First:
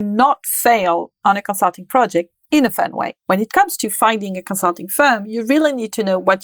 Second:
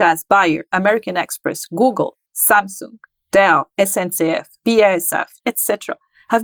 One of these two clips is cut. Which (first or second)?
second